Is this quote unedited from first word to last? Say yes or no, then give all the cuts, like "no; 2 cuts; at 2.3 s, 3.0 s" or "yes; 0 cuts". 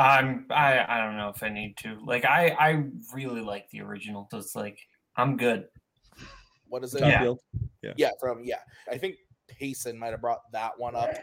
no; 3 cuts; at 4.3 s, 6.7 s, 8.9 s